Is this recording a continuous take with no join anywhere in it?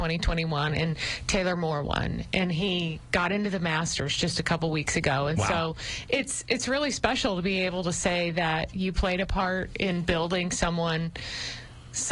yes; 0 cuts

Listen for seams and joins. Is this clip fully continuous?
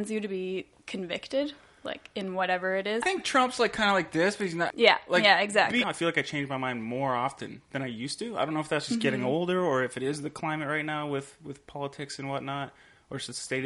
no; 3 cuts; at 3.0 s, 4.7 s, 5.8 s

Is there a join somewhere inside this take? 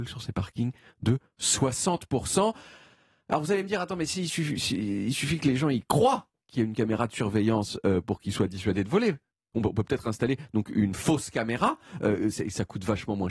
no; 0 cuts

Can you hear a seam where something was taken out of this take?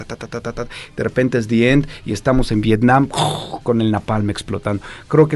no; 0 cuts

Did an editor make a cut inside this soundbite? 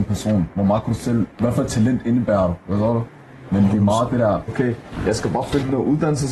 yes; 2 cuts; at 1.3 s, 4.5 s

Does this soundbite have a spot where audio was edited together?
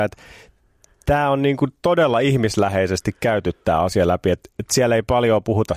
no; 0 cuts

